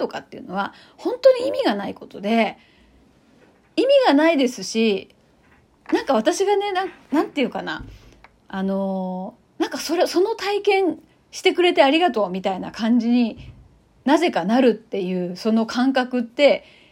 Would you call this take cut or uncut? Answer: uncut